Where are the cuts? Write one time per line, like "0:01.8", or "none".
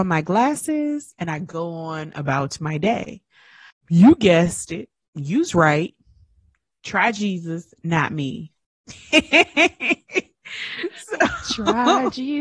0:03.7
0:08.6